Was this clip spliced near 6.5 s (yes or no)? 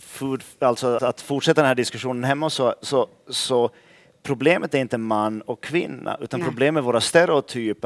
no